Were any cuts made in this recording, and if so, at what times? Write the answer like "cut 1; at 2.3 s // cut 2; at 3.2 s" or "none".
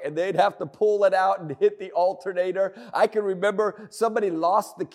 none